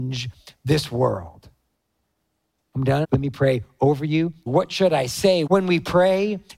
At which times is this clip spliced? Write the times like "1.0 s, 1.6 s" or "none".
3.0 s, 4.5 s, 5.5 s